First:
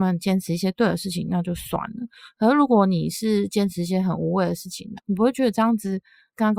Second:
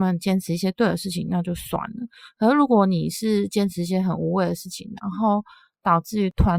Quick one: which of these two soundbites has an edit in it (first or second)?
first